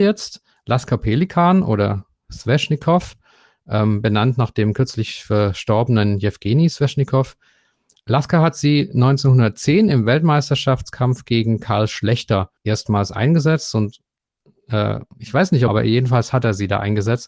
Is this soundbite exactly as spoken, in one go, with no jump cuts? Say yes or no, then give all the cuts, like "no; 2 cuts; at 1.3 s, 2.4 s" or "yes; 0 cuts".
no; 2 cuts; at 12.6 s, 15.7 s